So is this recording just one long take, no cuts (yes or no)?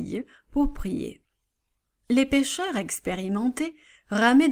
no